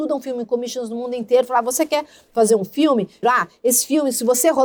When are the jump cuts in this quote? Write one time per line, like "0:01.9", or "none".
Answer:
0:03.2